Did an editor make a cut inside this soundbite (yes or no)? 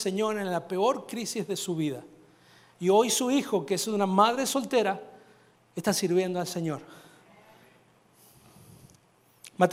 no